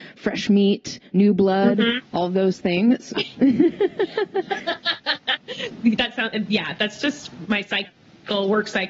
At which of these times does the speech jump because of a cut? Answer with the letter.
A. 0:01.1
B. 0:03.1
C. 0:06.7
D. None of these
B